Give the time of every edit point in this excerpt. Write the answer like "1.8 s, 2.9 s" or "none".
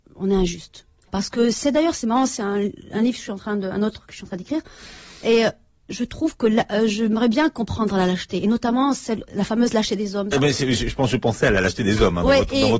1.1 s, 10.3 s